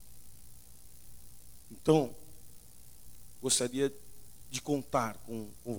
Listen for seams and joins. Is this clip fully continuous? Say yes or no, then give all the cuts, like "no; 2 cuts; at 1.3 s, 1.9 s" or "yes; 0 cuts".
yes; 0 cuts